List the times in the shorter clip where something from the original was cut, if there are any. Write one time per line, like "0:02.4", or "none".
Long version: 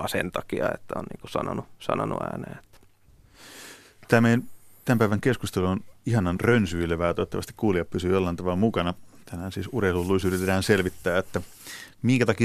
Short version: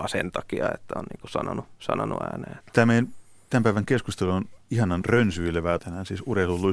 0:02.6
0:05.8